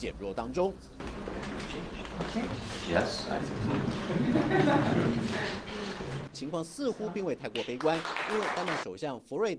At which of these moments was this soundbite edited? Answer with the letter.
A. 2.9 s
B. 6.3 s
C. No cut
B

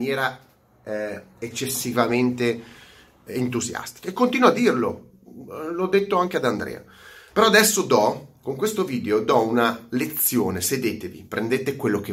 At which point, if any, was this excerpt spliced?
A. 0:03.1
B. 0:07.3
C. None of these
B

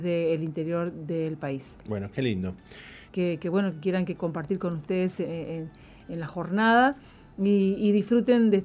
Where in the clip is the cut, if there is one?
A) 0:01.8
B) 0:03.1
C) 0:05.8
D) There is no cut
B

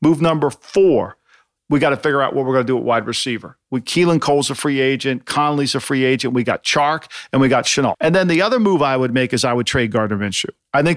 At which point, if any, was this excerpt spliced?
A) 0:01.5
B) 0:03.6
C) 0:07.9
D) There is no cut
C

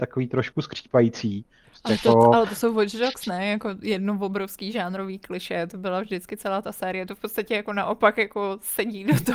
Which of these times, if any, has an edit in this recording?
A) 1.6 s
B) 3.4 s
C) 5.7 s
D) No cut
A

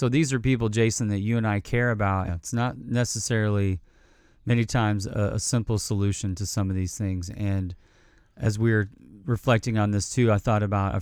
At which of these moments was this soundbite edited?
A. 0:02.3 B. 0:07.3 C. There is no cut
A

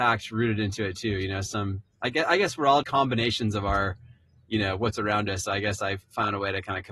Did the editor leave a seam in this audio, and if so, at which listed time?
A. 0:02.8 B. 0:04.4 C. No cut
A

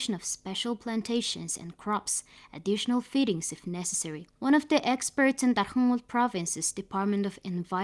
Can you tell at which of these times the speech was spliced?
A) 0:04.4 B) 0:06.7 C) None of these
A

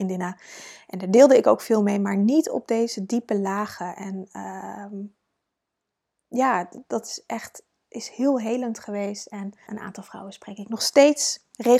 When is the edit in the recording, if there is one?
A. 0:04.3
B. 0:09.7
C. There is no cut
B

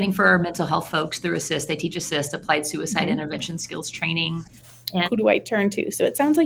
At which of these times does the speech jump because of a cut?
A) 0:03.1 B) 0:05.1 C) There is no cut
B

